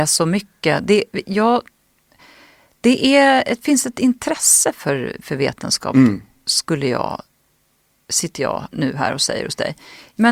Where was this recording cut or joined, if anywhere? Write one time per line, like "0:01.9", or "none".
none

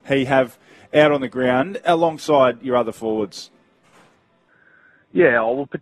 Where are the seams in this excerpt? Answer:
none

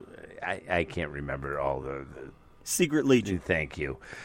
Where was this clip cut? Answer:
none

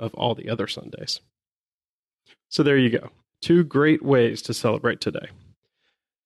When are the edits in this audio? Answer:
none

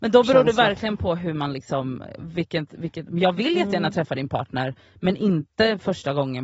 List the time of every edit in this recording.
none

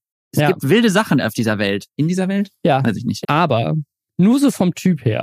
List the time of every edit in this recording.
0:01.9
0:03.2

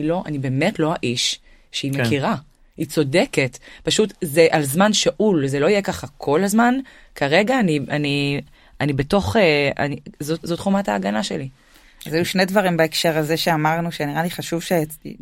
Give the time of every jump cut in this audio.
none

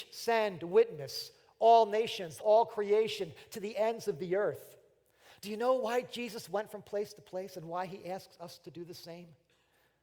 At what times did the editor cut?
0:02.4
0:05.4

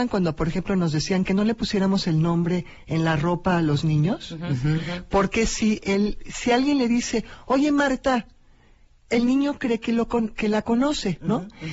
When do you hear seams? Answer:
none

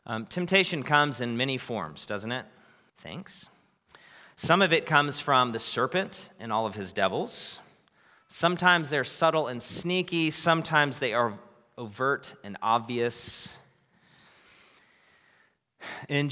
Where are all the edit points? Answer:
0:02.9

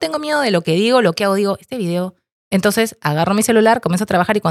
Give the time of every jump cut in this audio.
0:02.4

